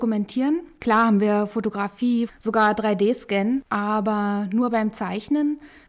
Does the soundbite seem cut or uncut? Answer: cut